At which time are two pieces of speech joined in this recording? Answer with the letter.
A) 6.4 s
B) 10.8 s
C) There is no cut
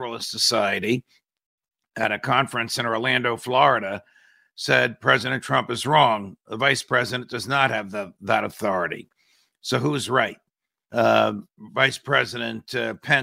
B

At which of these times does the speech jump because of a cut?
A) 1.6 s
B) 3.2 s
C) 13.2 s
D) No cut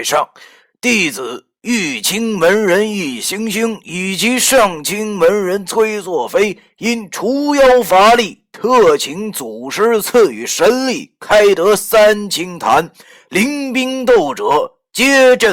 D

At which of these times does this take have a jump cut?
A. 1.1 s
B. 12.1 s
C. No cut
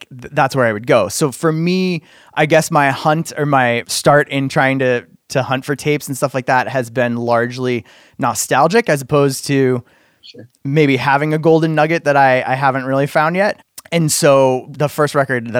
C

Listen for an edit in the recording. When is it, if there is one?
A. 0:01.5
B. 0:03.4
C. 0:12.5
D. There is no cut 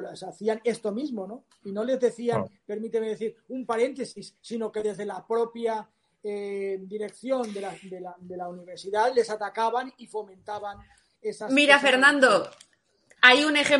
D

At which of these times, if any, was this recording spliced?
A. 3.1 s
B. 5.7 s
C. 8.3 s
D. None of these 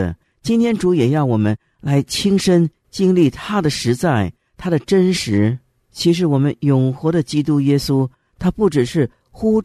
D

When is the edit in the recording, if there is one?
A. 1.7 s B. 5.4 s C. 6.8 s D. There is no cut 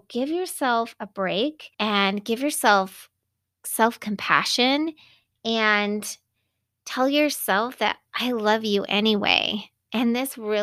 A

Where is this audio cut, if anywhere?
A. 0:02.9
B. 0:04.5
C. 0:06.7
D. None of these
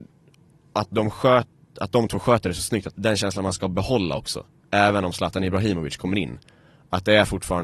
A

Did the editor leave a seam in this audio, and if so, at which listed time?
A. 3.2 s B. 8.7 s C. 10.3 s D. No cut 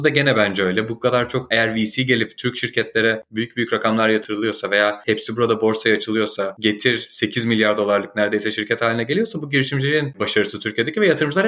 D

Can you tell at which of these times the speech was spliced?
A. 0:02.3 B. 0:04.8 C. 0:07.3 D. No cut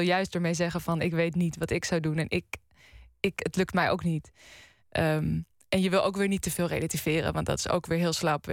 B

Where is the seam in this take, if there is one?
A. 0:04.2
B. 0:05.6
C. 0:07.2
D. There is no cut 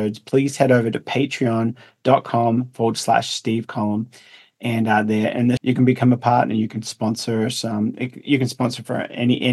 B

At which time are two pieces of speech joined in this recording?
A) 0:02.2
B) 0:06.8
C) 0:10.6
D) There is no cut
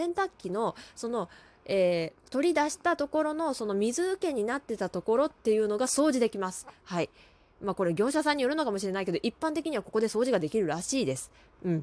A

